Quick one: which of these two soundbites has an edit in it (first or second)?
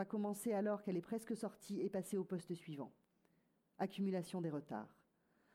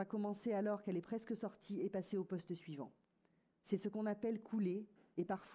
second